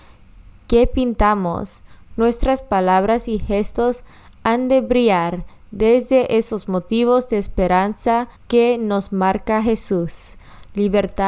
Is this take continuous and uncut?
no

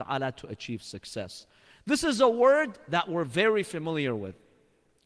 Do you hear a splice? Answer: no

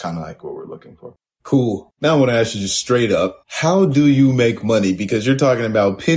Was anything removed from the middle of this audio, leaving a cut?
yes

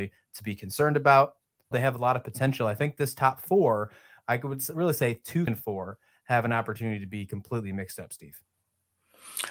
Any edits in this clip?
yes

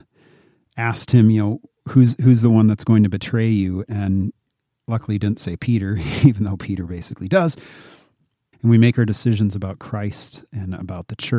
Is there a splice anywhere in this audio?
yes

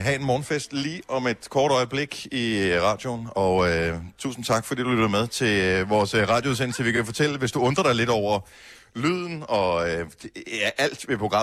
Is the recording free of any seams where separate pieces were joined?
yes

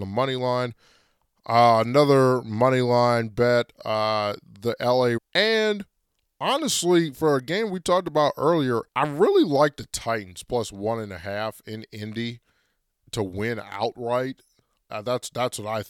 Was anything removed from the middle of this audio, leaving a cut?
yes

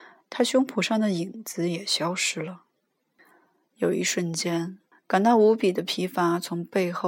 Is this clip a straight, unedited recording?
no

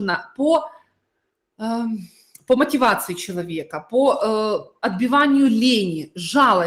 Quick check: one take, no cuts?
yes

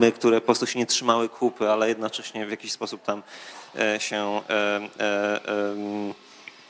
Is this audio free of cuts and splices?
yes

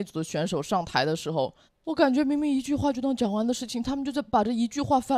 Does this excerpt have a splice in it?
no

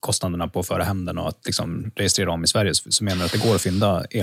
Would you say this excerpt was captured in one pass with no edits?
yes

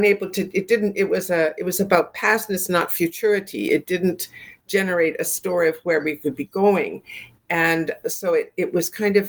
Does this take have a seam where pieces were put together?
no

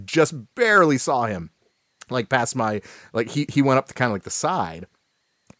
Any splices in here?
yes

